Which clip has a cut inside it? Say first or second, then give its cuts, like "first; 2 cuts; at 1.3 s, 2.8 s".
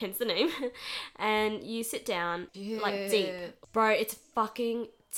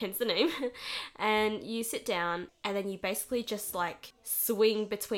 first; 1 cut; at 2.5 s